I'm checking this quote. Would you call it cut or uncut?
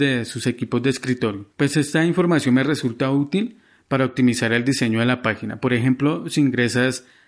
cut